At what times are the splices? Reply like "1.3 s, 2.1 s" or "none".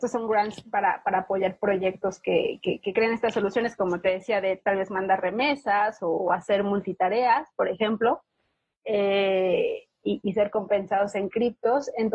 none